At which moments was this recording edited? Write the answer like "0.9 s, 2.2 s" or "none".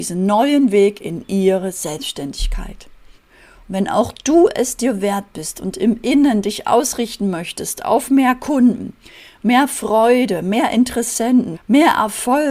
3.2 s, 11.5 s